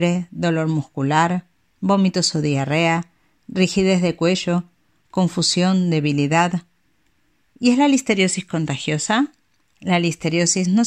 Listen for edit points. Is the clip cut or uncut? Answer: uncut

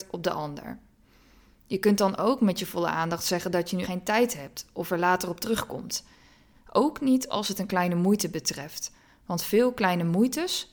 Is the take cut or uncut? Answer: cut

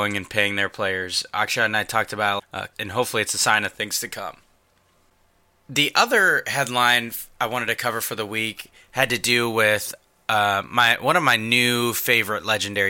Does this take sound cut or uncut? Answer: cut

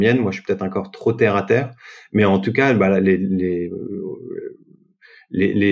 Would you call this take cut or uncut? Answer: uncut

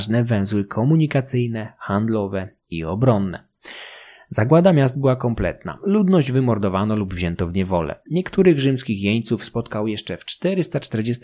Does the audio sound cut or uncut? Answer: uncut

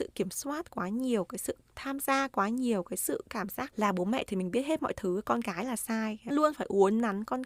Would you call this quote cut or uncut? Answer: cut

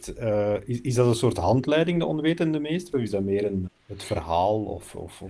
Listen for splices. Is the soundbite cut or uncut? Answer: cut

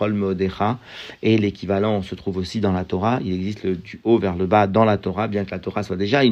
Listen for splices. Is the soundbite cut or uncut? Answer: uncut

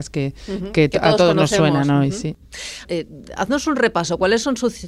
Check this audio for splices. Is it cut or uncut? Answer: cut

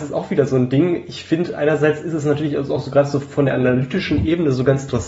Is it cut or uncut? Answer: uncut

